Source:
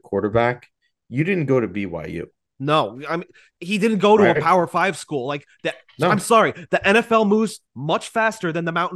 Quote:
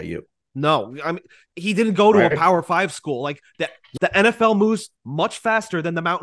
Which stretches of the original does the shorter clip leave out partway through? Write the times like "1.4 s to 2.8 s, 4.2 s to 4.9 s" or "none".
6.0 s to 6.7 s